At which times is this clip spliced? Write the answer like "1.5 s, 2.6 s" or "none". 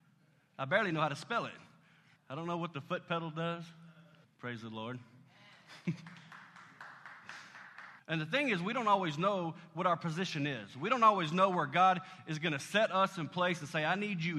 2.2 s, 4.2 s, 8.0 s